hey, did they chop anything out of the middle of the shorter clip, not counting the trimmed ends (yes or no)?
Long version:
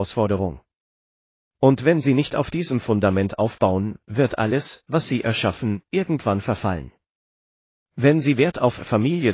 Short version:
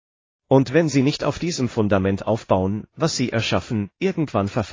yes